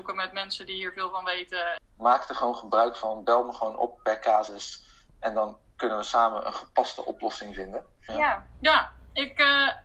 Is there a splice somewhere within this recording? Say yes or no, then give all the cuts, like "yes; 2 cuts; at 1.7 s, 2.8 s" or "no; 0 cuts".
yes; 2 cuts; at 1.8 s, 8.1 s